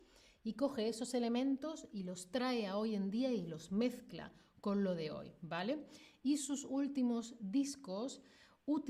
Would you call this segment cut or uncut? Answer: uncut